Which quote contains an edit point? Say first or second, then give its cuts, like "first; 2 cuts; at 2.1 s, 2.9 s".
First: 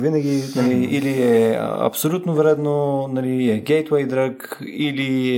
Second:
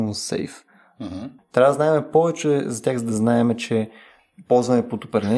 second; 1 cut; at 1.4 s